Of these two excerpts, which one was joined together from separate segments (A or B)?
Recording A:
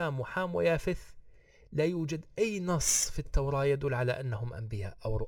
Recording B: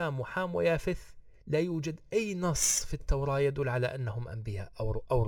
B